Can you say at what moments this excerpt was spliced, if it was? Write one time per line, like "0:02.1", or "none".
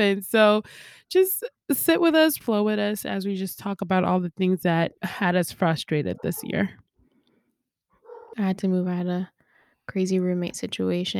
0:02.4
0:05.0
0:08.3